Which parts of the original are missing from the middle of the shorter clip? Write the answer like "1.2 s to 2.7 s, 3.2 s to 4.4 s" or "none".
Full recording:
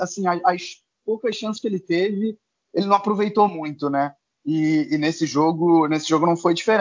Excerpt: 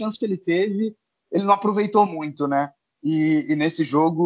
none